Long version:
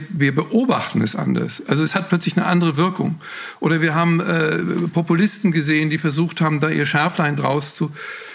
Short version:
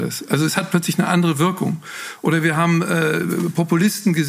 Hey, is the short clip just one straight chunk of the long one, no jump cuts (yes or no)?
yes